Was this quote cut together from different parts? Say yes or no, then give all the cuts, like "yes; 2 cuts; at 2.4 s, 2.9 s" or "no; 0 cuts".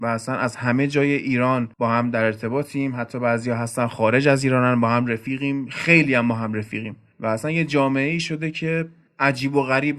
yes; 1 cut; at 1.7 s